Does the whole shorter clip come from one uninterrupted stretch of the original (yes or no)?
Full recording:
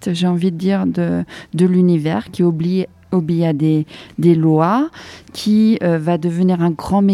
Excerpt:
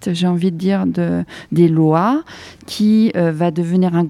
no